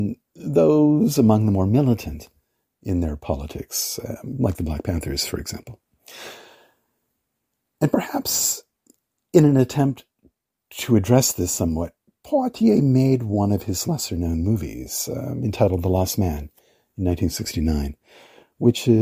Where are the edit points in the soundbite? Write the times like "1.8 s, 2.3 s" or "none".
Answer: none